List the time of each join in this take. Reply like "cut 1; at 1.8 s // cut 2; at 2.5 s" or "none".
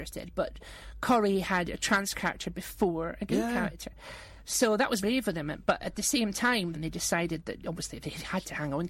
cut 1; at 5.0 s // cut 2; at 6.7 s